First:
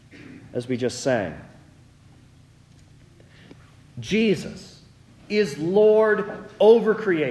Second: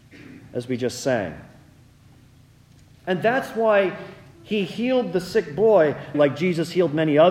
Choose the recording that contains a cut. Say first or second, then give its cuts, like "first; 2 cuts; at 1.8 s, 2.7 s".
second; 2 cuts; at 2.9 s, 6.1 s